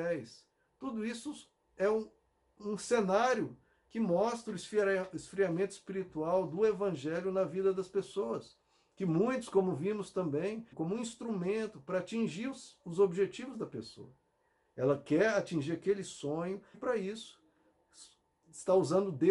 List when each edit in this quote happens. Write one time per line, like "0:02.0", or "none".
0:10.7
0:16.7